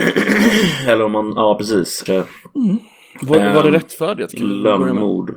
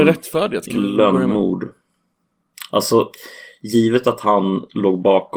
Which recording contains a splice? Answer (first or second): first